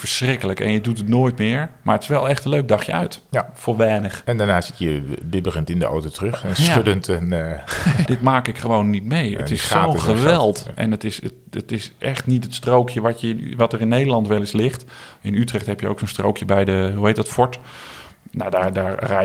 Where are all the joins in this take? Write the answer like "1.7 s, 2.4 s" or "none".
8.1 s